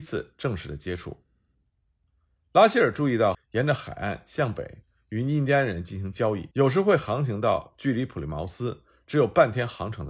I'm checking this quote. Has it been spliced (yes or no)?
yes